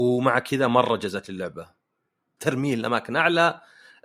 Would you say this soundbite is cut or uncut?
cut